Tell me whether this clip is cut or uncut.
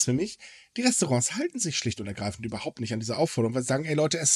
uncut